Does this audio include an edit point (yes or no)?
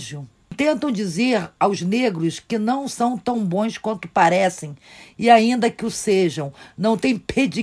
no